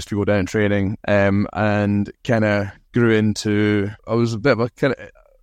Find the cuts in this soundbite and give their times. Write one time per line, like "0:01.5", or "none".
0:01.0
0:04.0